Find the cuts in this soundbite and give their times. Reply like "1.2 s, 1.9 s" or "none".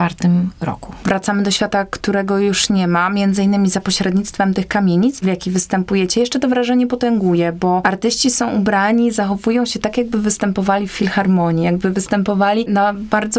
1.0 s, 5.2 s